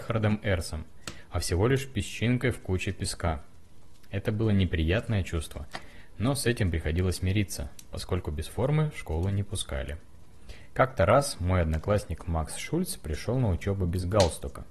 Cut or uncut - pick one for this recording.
uncut